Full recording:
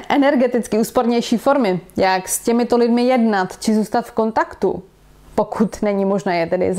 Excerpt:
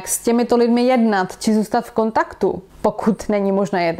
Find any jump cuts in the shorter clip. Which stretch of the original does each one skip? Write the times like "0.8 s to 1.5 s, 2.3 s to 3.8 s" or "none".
4.9 s to 5.2 s